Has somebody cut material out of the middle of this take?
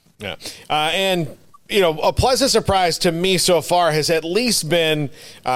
no; 0 cuts

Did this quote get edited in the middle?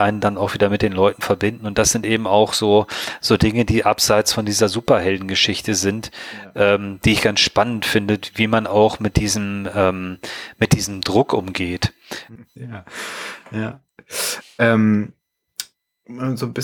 yes; 1 cut; at 12.4 s

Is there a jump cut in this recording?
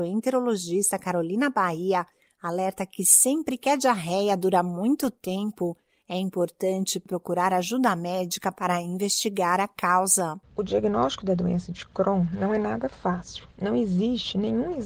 no; 0 cuts

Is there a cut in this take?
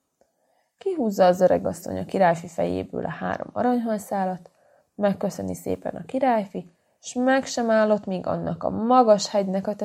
yes; 1 cut; at 4.8 s

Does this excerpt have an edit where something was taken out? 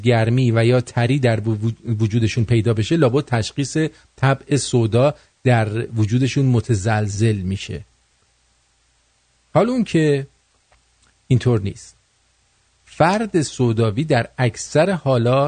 no; 0 cuts

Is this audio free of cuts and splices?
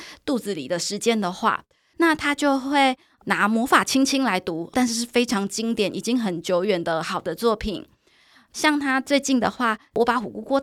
no; 2 cuts; at 1.9 s, 4.7 s

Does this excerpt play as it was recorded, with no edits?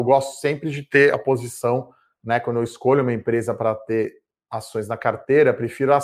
yes; 0 cuts

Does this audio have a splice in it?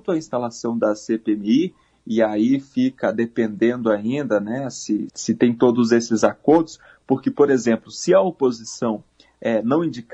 yes; 1 cut; at 5.1 s

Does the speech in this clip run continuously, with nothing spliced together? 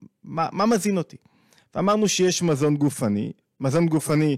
yes; 0 cuts

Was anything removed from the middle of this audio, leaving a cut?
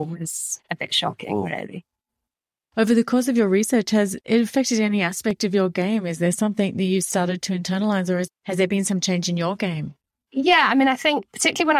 no; 0 cuts

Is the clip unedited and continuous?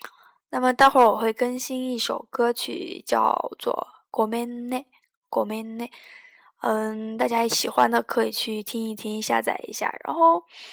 yes; 0 cuts

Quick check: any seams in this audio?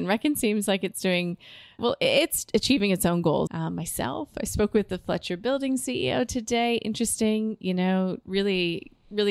yes; 2 cuts; at 1.8 s, 3.5 s

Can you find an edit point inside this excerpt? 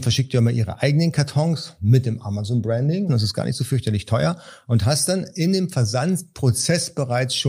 yes; 1 cut; at 3.1 s

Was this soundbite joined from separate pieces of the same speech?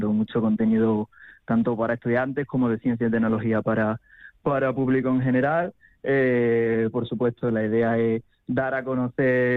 no; 0 cuts

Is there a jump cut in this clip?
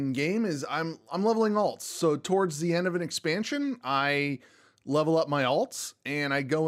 no; 0 cuts

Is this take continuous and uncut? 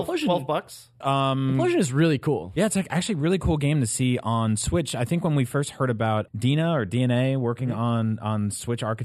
no; 2 cuts; at 1.0 s, 6.3 s

